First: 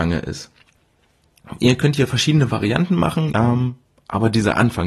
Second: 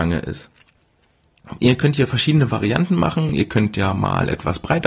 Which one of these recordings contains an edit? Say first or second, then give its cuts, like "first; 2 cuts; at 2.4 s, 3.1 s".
first; 1 cut; at 3.3 s